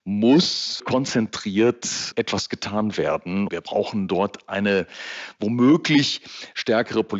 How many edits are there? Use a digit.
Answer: 1